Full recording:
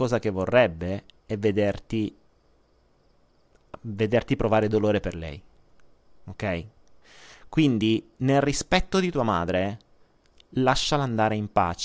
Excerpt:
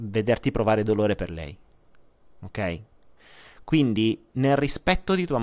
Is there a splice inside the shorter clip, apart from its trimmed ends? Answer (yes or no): no